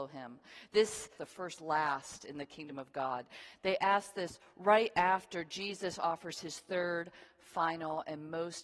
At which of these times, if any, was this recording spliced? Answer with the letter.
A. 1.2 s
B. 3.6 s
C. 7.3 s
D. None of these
A